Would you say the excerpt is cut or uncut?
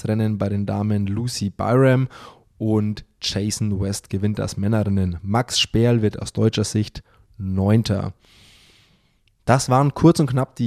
uncut